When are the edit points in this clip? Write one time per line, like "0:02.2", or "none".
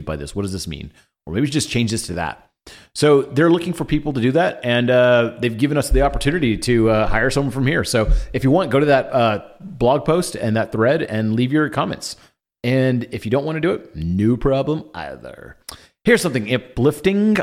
none